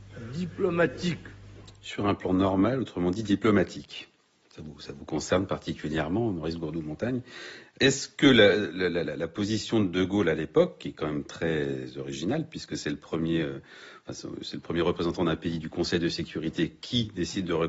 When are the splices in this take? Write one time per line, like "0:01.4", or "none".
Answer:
none